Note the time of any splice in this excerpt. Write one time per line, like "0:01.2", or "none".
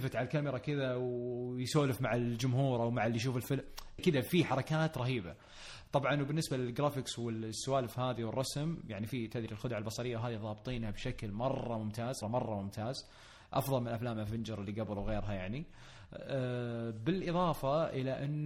0:04.0
0:12.2